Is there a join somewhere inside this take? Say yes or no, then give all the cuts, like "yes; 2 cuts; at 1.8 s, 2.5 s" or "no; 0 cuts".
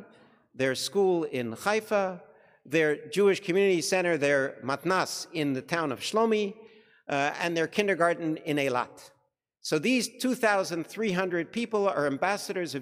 no; 0 cuts